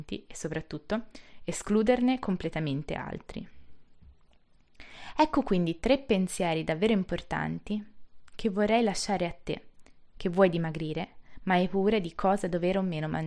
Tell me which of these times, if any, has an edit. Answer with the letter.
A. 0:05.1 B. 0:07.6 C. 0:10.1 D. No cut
D